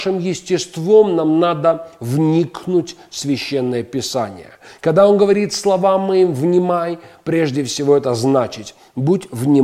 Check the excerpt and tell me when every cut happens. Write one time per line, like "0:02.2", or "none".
none